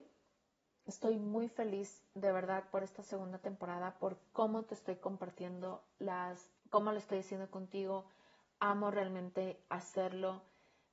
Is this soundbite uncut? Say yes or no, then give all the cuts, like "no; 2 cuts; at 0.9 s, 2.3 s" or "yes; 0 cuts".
no; 1 cut; at 6.6 s